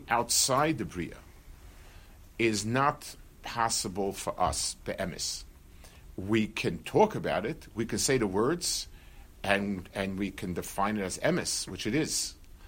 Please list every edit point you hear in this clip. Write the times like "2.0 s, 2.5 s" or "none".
none